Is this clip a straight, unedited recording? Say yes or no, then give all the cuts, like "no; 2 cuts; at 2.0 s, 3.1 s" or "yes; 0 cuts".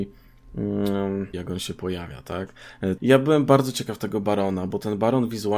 no; 2 cuts; at 1.3 s, 3.0 s